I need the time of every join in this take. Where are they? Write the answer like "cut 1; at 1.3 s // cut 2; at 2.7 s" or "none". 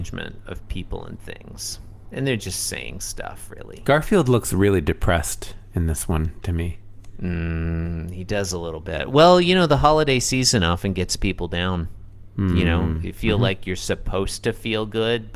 none